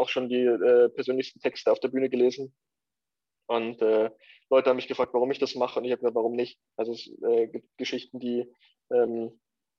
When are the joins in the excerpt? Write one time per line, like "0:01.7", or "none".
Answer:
none